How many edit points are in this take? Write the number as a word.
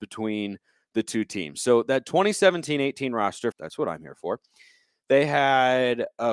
one